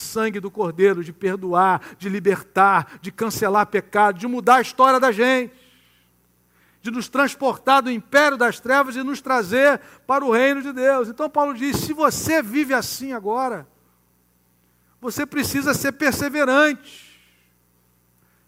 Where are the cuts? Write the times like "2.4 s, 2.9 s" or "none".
none